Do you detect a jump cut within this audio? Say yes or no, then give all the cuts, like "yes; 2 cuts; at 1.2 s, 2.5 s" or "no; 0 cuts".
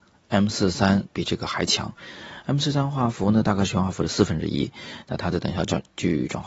no; 0 cuts